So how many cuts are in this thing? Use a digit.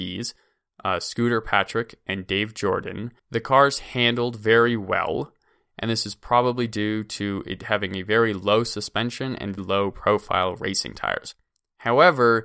2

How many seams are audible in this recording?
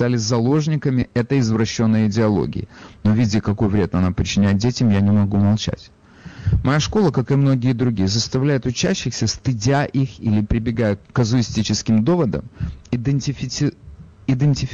1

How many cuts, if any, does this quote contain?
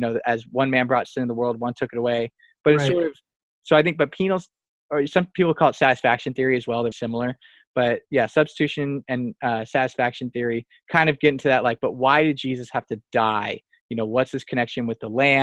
1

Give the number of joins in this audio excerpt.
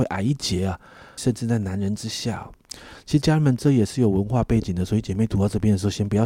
1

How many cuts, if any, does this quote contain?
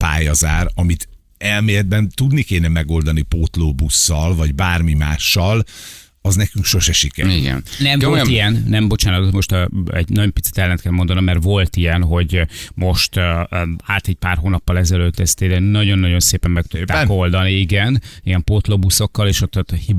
0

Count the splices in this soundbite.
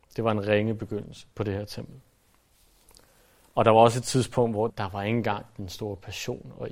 2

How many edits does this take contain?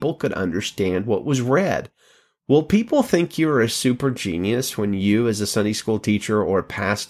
0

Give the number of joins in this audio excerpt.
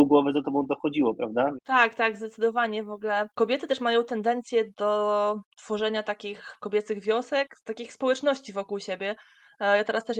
1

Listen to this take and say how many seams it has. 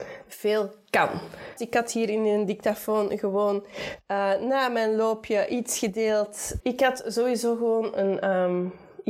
2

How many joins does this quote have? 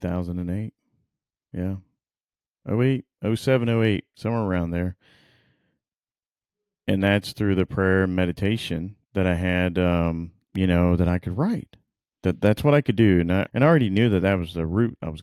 3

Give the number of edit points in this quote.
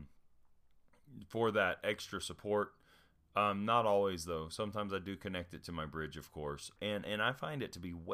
1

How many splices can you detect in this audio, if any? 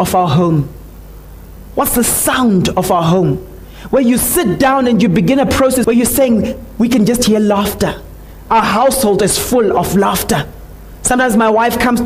1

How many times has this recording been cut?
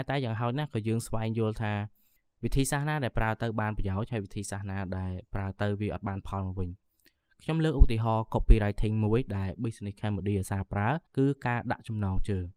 1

